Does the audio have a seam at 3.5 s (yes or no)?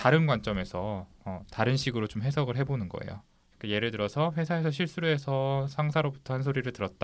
yes